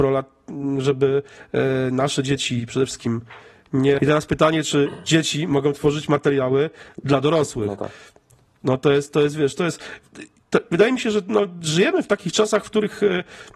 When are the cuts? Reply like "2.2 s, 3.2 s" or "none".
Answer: 4.0 s

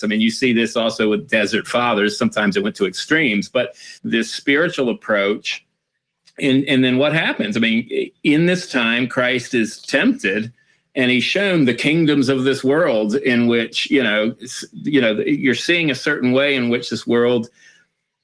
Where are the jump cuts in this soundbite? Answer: 4.0 s

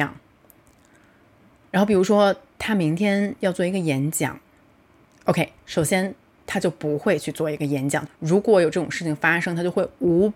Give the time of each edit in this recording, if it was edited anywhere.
1.7 s, 8.1 s

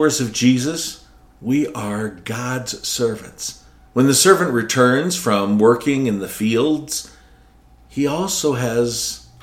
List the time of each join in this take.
3.8 s

